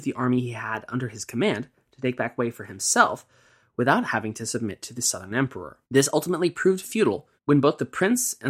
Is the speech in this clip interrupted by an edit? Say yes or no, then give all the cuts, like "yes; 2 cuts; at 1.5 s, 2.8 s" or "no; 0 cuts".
yes; 2 cuts; at 5.8 s, 7.4 s